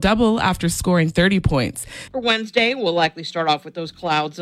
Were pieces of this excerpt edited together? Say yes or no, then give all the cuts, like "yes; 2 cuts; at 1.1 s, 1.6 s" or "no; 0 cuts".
yes; 1 cut; at 2.1 s